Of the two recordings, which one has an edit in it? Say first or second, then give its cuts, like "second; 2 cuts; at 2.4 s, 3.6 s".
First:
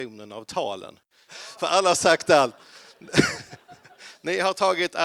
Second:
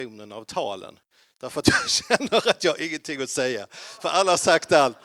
first; 1 cut; at 1.3 s